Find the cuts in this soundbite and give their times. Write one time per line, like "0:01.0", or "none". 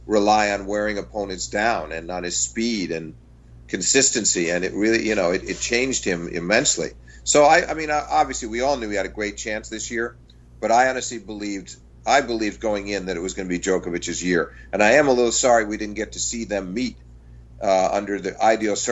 none